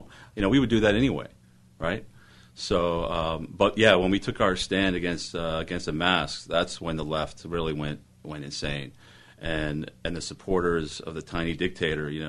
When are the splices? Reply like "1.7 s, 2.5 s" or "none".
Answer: none